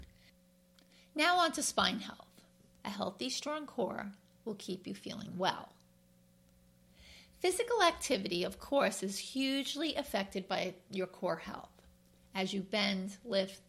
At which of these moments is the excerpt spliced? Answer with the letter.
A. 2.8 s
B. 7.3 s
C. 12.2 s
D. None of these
A